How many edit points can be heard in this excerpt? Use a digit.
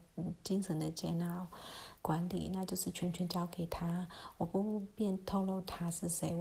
1